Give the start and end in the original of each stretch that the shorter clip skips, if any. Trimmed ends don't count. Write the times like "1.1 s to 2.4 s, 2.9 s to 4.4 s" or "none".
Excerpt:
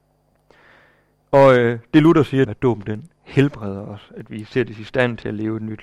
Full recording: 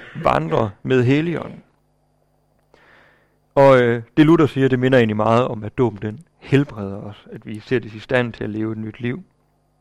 4.7 s to 5.6 s